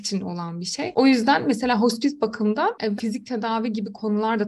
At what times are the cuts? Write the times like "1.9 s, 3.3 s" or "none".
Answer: 3.0 s